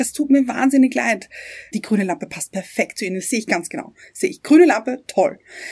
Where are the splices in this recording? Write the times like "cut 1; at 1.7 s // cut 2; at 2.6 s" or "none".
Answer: cut 1; at 1.7 s